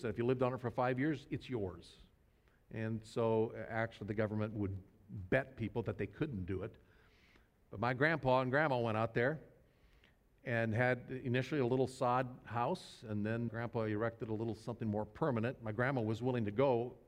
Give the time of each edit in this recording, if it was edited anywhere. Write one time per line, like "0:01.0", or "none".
0:13.5